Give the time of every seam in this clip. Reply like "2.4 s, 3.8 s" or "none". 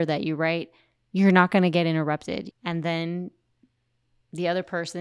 2.5 s